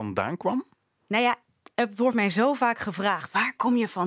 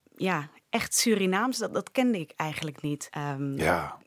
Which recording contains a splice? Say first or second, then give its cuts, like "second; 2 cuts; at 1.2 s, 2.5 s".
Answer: second; 1 cut; at 3.1 s